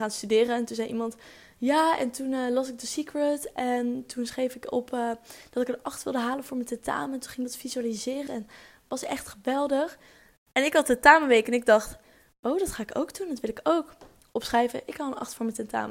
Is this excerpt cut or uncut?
cut